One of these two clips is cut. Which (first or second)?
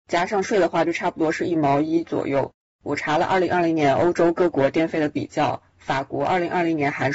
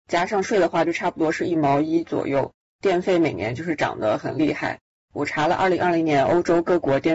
first